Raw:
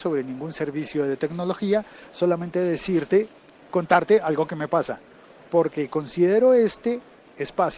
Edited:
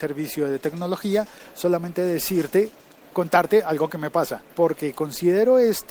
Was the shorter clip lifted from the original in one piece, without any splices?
no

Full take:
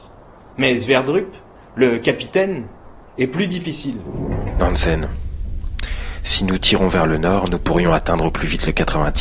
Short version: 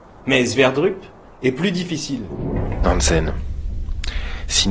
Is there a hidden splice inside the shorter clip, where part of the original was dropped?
yes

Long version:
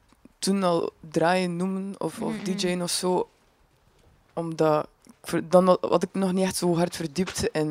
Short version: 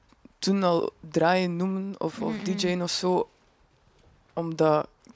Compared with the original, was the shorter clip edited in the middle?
no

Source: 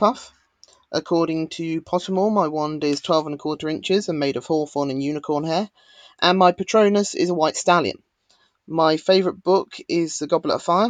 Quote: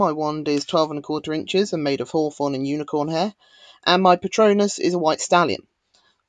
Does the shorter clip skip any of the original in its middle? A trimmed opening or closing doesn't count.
no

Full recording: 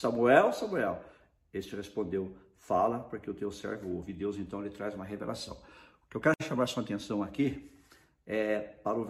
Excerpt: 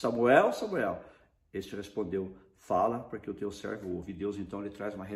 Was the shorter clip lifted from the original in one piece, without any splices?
yes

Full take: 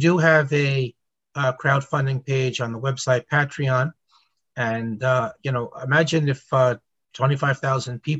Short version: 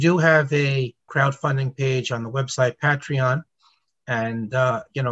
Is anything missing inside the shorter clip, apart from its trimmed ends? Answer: yes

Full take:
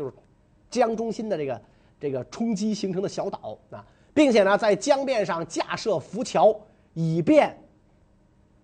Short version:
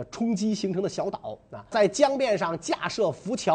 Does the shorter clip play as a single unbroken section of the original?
no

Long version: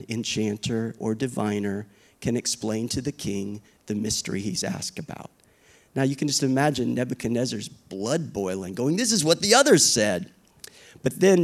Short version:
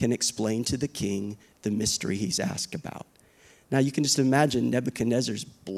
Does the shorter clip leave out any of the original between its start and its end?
no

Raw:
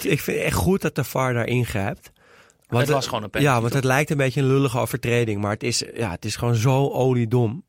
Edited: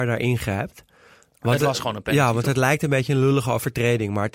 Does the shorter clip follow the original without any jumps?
yes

